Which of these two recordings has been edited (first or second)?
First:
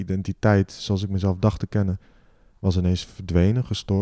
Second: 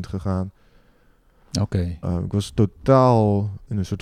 second